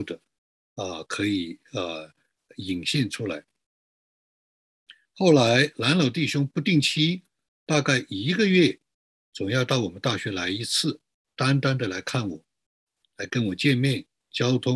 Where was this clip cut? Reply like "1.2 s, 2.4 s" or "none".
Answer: none